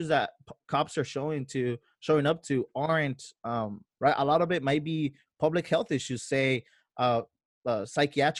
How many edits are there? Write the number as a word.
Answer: one